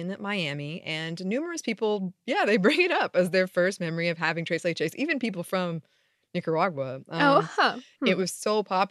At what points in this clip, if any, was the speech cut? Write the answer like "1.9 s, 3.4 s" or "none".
none